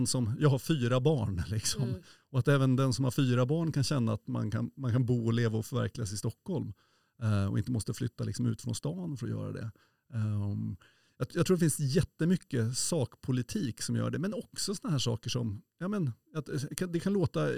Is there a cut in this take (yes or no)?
no